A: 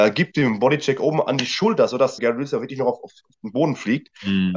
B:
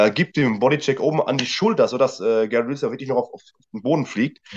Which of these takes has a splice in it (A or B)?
A